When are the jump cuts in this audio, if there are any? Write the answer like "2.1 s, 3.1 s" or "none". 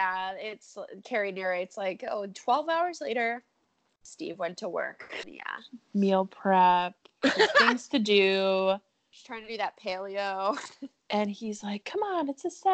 5.2 s

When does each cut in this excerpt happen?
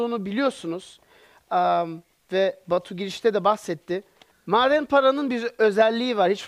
4.3 s

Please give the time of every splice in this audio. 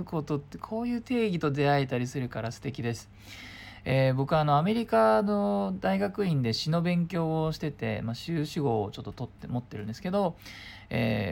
none

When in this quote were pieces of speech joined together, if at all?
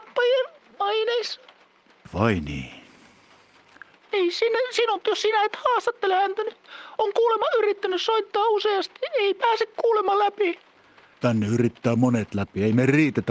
3.9 s

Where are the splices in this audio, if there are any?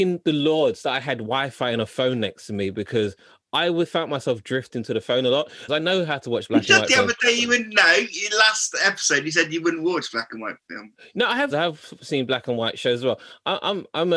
5.7 s, 11.5 s

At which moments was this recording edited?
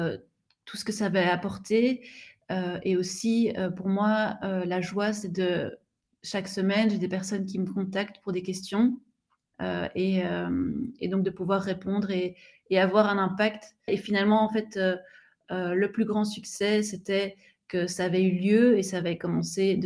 9.5 s, 13.9 s

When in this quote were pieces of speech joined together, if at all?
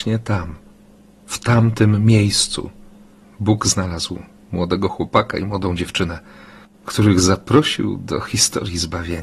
none

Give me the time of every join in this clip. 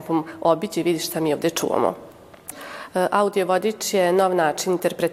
2.5 s

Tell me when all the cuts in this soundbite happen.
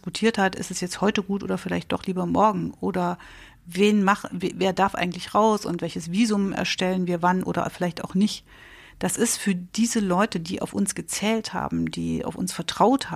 none

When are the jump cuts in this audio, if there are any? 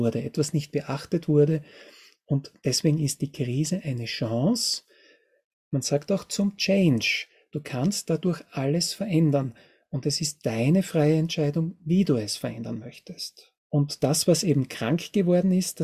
13.6 s

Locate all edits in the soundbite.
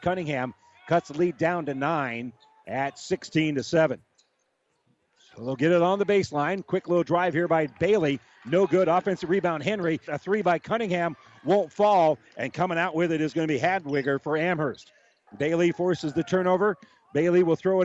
10.1 s, 15.3 s

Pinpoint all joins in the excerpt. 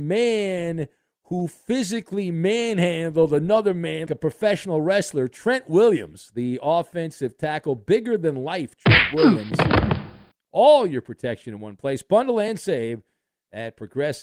4.1 s, 10.5 s

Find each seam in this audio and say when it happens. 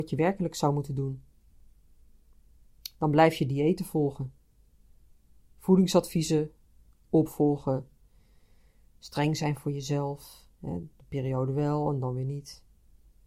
10.5 s

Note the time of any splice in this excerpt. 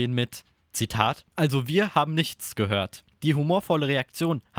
none

